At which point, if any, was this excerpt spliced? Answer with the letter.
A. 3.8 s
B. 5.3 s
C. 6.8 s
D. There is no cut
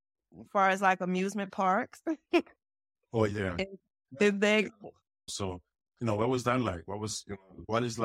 B